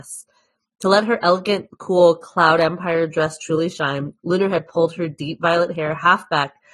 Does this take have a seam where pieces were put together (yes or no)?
no